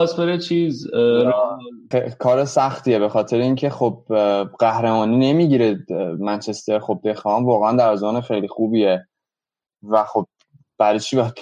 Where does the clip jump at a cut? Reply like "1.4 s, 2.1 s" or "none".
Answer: 1.9 s